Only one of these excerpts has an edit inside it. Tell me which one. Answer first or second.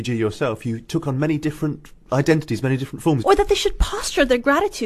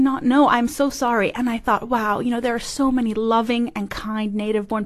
first